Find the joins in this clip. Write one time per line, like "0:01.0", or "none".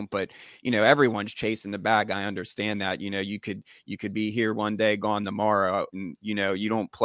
0:05.9

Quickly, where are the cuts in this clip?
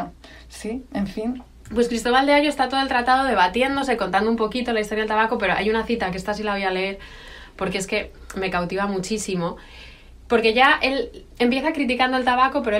none

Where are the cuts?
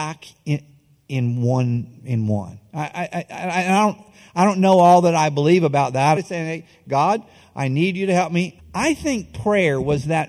0:06.2
0:08.6

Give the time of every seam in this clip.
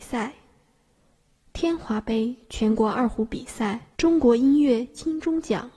0:03.9

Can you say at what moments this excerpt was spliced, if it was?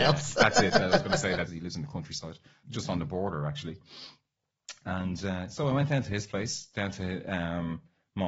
0:01.5

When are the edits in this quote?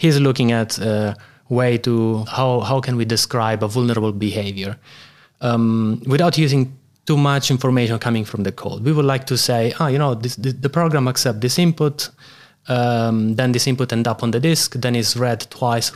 0:02.3

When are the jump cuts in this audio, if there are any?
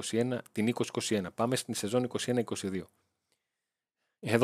none

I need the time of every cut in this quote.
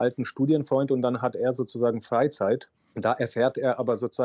none

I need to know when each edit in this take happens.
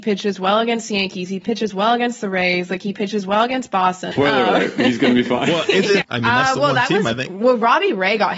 0:04.1
0:06.0

